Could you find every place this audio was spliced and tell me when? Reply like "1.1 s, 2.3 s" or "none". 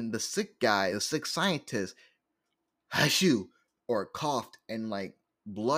none